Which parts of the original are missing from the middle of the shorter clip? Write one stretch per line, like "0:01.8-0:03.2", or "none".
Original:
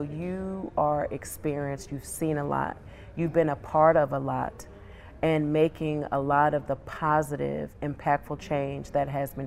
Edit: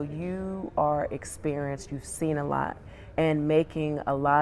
0:03.1-0:05.2